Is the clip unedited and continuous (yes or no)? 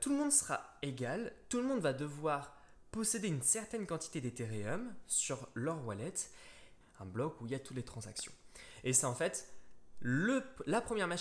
no